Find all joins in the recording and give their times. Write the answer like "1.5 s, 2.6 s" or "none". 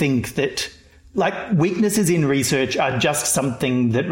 none